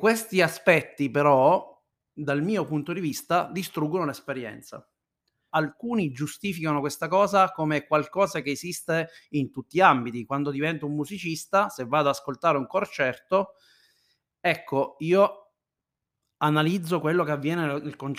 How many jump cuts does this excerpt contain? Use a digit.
1